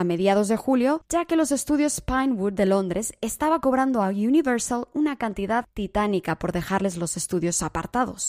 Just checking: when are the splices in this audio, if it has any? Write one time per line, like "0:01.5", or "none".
none